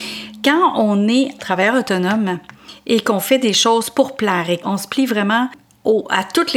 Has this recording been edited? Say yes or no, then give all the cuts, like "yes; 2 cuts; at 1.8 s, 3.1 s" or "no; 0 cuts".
no; 0 cuts